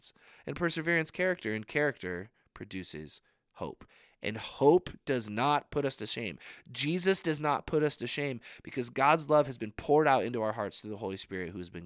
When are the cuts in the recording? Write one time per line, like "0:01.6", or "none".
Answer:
none